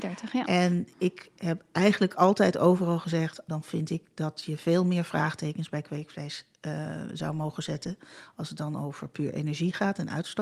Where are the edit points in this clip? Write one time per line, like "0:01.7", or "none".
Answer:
0:03.5